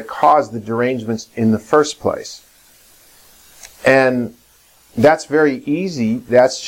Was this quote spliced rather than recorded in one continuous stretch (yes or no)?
yes